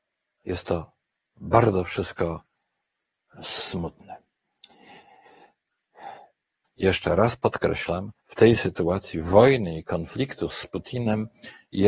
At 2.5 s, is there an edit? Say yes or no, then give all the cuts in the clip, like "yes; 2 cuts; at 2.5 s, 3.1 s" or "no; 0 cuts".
no; 2 cuts; at 6.6 s, 8.2 s